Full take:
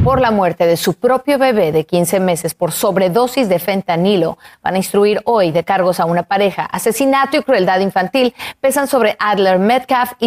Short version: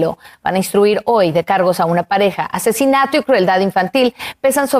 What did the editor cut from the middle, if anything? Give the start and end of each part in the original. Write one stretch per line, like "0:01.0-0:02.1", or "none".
none

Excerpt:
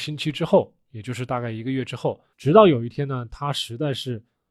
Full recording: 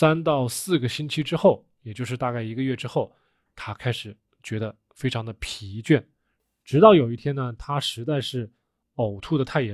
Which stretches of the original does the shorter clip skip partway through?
0:03.2-0:06.6

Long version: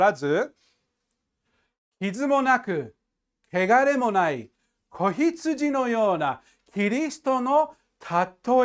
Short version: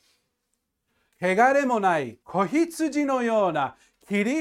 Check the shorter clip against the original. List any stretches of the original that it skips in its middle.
0:01.7-0:03.4
0:04.5-0:04.9

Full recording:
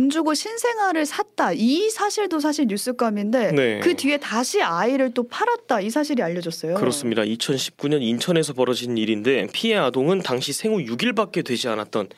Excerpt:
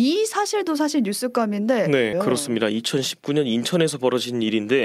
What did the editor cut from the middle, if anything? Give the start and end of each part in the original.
0:03.8-0:06.7

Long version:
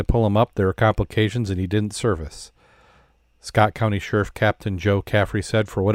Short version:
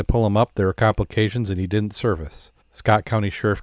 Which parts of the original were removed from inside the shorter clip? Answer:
0:02.6-0:03.3

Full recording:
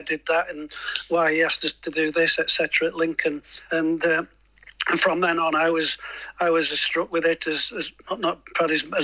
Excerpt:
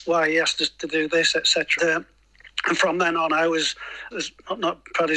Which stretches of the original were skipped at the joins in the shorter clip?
0:02.8-0:04.0
0:06.3-0:07.7

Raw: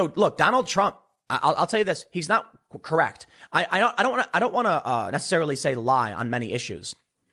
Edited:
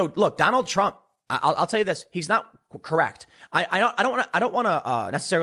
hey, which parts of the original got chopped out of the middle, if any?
none

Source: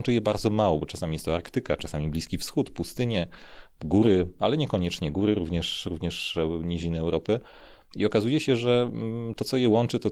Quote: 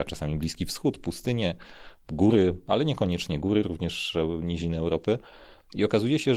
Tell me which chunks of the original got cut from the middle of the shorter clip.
0:05.4-0:05.8

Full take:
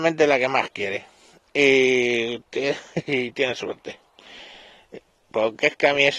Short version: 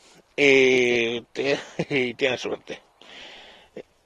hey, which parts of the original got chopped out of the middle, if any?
none

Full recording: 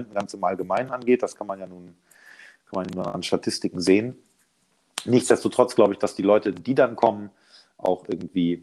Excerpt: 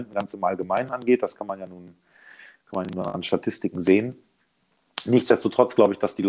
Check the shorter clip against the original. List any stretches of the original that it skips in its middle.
none

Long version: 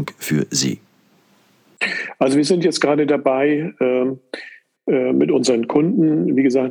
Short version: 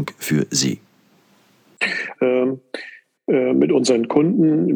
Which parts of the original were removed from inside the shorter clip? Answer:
0:02.2-0:03.7

